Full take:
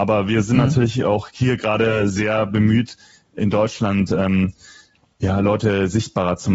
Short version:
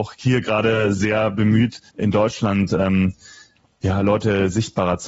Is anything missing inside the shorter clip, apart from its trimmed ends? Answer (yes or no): yes